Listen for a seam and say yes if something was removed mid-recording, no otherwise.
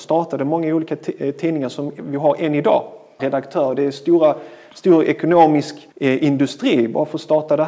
yes